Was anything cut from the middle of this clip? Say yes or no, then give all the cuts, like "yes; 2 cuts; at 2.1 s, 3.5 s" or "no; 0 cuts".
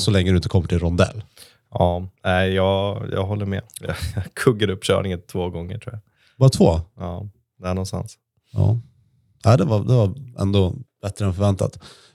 yes; 1 cut; at 2.2 s